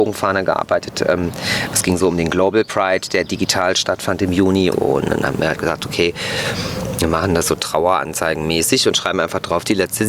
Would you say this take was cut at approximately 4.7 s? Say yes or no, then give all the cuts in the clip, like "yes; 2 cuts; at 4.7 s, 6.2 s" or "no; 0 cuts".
yes; 1 cut; at 4.7 s